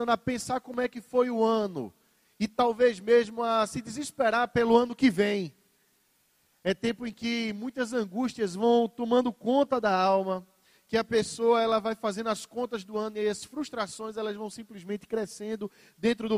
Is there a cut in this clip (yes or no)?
no